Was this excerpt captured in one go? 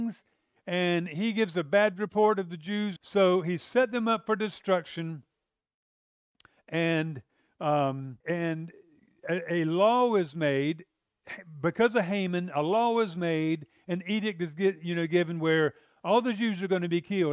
no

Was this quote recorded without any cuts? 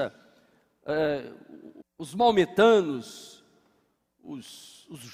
no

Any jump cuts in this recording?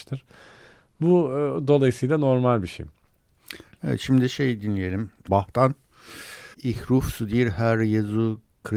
yes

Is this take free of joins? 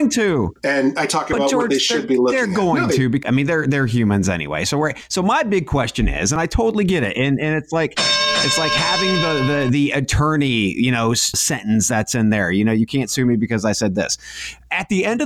yes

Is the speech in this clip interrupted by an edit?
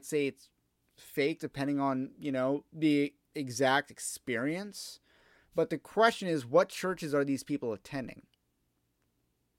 no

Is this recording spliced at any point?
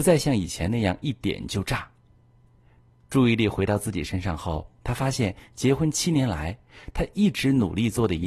no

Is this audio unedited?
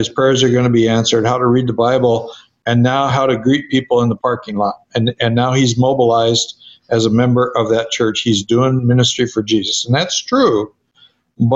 yes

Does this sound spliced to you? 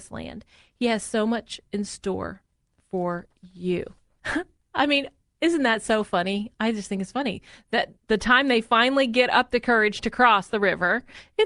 yes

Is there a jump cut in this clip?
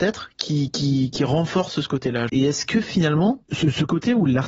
yes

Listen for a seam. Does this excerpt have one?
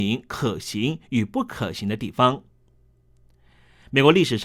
no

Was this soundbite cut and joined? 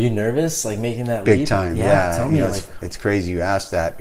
no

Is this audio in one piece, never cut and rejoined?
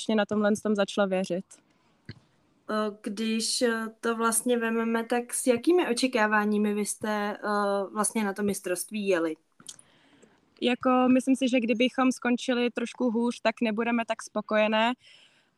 no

